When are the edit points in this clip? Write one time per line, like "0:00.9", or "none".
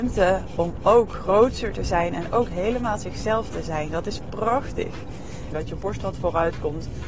0:03.9
0:05.5